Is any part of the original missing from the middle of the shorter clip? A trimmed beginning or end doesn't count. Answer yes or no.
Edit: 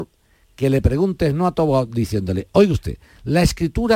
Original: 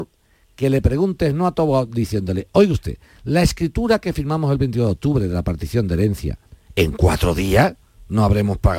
no